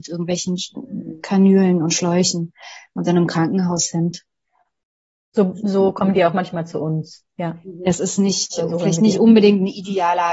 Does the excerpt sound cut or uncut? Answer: uncut